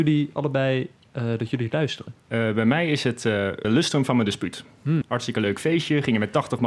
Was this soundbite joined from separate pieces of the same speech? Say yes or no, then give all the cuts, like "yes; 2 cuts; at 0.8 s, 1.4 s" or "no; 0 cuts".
yes; 3 cuts; at 2.2 s, 3.6 s, 5.0 s